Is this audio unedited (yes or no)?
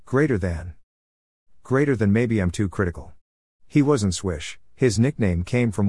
yes